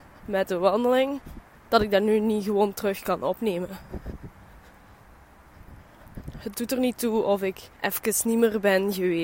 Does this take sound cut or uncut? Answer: uncut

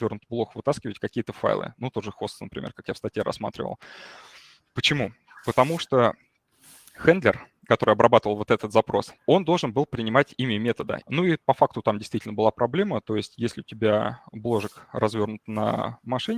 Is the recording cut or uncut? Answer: cut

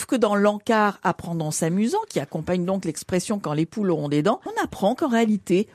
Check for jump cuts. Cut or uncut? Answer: cut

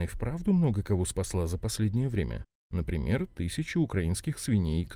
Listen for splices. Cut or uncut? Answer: uncut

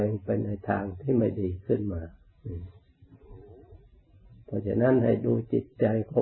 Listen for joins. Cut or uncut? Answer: uncut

